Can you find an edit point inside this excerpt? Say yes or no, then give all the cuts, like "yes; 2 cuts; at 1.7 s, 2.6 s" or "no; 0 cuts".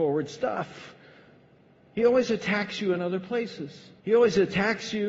yes; 1 cut; at 4.0 s